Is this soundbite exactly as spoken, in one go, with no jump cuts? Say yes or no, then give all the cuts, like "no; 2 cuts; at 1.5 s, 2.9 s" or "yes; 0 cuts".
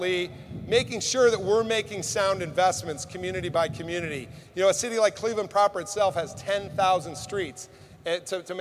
yes; 0 cuts